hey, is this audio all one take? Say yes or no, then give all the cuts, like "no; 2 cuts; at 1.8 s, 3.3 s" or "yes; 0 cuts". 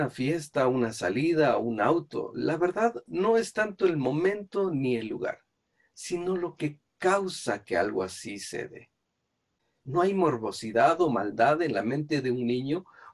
no; 1 cut; at 9.8 s